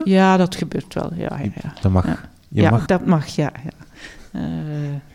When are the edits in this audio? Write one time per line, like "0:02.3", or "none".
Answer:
0:02.9